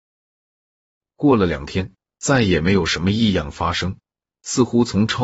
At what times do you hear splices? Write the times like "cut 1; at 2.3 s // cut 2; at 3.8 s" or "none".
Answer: cut 1; at 2.1 s